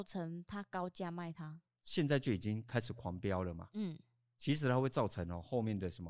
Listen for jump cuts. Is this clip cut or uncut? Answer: uncut